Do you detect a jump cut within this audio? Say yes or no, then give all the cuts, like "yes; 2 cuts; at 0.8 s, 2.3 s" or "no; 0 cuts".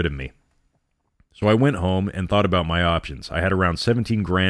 no; 0 cuts